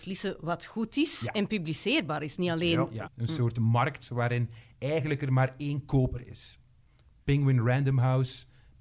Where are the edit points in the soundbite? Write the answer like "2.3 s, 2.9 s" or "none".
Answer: 3.1 s